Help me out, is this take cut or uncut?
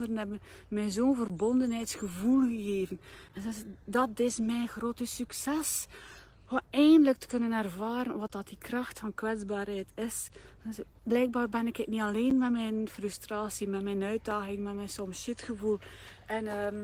uncut